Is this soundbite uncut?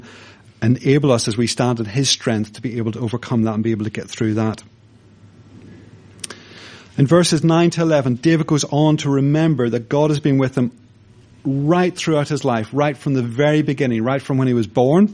yes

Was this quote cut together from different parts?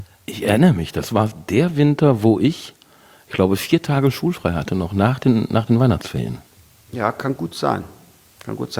no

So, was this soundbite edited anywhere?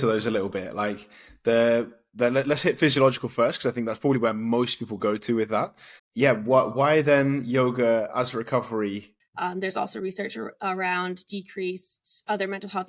yes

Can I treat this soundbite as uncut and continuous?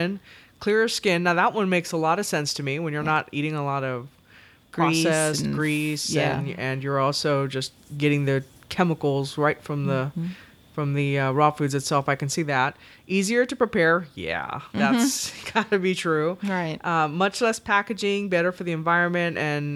yes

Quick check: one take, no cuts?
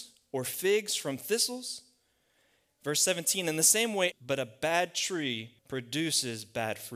no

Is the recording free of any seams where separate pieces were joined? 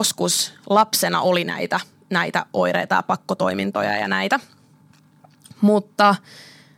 yes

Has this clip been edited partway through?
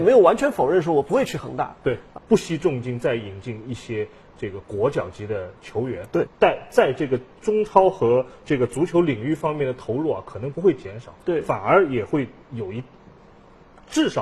yes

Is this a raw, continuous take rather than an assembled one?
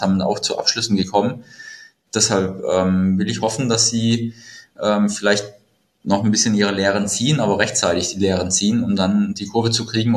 yes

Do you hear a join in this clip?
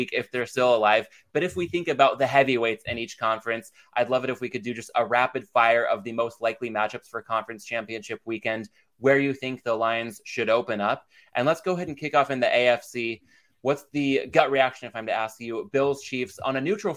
no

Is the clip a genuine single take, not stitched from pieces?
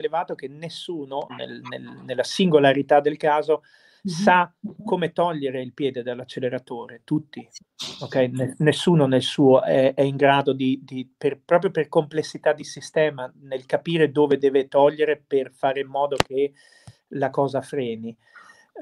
no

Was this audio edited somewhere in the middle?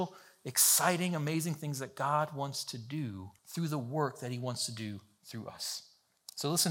yes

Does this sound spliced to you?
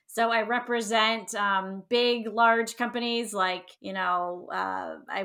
yes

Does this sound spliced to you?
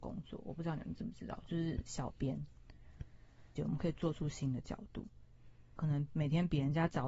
yes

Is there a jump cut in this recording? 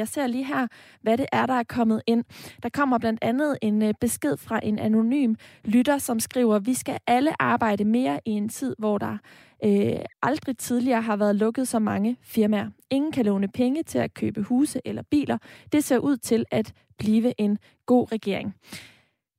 yes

